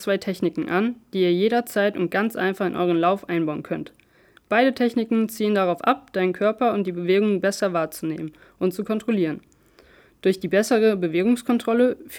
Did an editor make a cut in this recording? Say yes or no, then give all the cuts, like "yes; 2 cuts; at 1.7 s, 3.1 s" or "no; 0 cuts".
no; 0 cuts